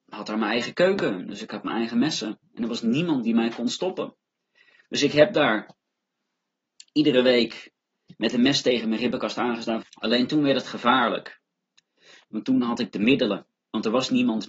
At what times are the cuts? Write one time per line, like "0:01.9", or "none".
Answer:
0:09.8